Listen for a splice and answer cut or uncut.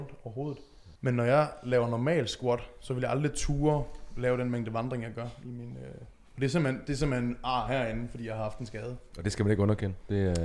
cut